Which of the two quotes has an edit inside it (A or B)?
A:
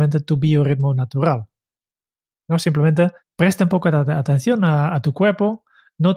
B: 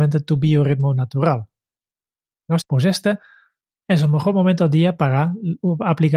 B